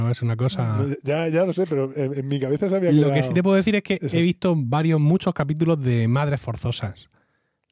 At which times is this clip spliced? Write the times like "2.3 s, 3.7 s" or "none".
none